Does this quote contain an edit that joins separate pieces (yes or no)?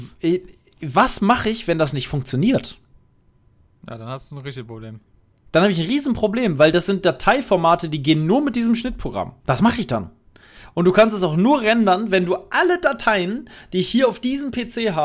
yes